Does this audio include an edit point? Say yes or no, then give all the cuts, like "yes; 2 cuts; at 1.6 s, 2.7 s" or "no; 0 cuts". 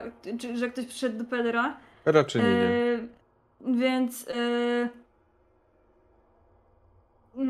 no; 0 cuts